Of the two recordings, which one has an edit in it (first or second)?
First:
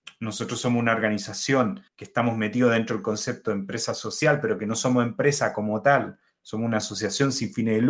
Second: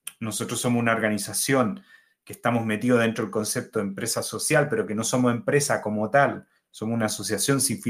first